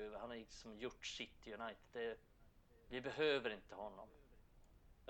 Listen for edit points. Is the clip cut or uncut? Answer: uncut